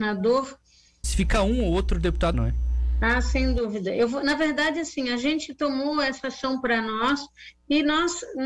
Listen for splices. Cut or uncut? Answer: cut